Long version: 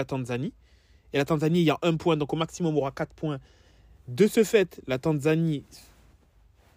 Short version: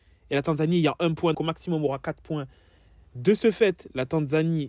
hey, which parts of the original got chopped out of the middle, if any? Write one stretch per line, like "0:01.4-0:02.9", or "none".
0:02.2-0:02.3